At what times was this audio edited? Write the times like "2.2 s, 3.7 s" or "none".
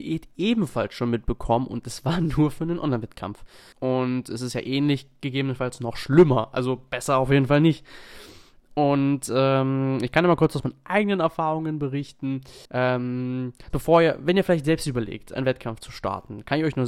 3.7 s, 12.7 s, 13.7 s